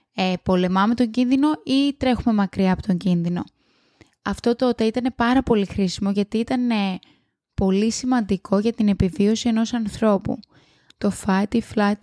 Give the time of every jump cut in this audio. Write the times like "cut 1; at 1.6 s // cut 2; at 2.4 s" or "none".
cut 1; at 10.9 s